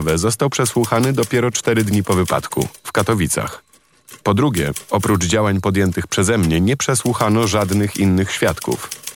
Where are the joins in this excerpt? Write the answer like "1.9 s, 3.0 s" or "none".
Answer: 4.2 s